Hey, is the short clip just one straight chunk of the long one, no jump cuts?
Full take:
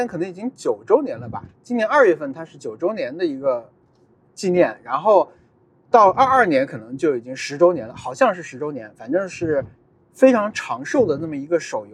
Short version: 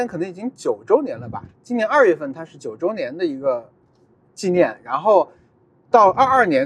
yes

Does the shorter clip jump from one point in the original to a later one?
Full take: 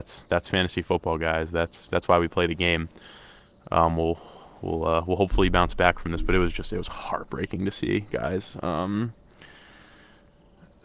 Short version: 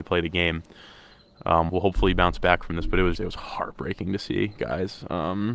yes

